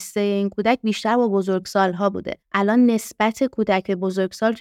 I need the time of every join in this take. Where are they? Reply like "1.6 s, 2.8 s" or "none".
2.4 s